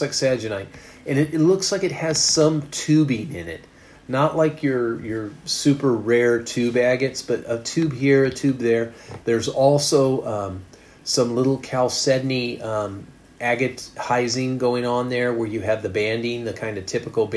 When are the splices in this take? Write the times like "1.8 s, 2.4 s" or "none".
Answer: 9.2 s